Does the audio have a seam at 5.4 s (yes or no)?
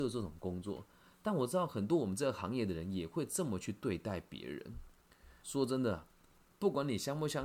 yes